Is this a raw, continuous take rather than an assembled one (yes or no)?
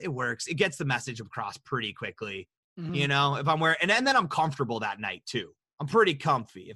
yes